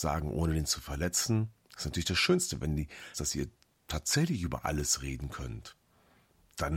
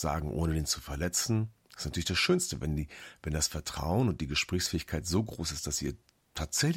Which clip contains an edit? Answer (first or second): first